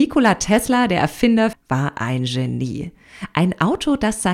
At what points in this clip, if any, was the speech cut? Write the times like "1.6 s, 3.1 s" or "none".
1.5 s

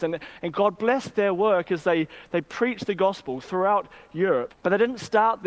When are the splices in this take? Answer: 4.5 s

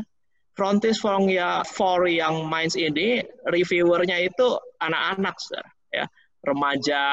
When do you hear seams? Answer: 1.6 s

